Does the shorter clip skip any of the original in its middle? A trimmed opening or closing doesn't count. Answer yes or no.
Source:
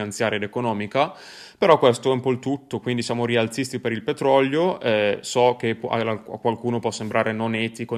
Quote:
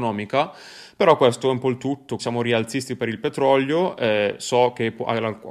yes